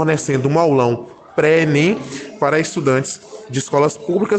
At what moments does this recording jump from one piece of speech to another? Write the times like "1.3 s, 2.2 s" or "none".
none